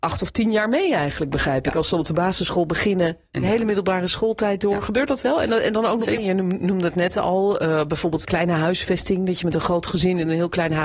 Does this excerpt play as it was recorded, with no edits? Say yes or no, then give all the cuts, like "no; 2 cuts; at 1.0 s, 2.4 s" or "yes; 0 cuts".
no; 2 cuts; at 6.2 s, 8.2 s